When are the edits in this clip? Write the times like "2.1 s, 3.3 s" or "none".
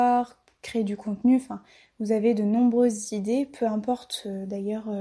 none